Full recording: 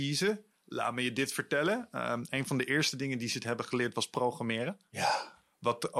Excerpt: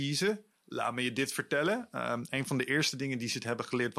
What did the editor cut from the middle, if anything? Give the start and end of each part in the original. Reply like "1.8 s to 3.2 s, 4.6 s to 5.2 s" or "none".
none